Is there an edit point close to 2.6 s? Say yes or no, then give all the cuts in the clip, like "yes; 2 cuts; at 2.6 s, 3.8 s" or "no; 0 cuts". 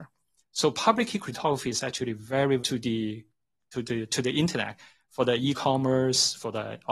yes; 1 cut; at 2.6 s